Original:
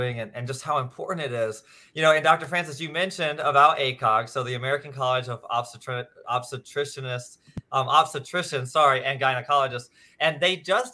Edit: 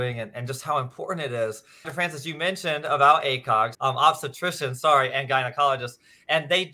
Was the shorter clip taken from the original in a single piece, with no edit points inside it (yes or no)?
no